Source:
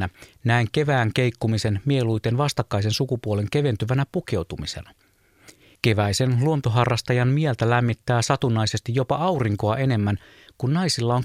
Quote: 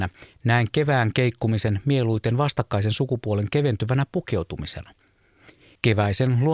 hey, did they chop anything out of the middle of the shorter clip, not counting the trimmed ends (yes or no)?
no